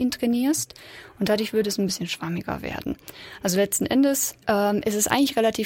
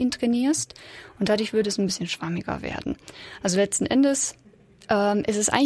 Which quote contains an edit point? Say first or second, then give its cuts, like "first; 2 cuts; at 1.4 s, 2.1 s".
first; 1 cut; at 4.4 s